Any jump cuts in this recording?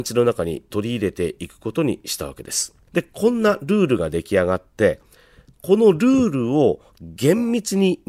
yes; 1 cut; at 2.9 s

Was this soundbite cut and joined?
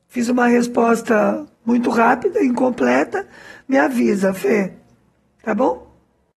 no; 0 cuts

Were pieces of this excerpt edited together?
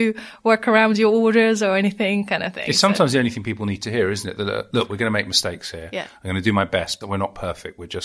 yes; 1 cut; at 7.0 s

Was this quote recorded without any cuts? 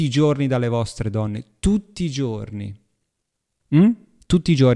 yes; 0 cuts

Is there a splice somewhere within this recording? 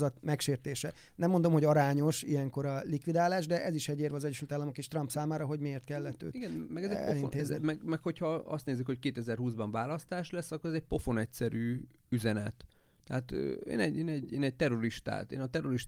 no; 0 cuts

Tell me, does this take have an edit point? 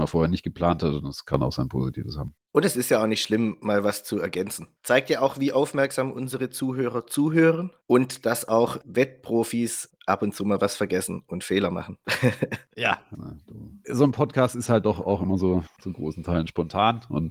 yes; 2 cuts; at 7.8 s, 13.1 s

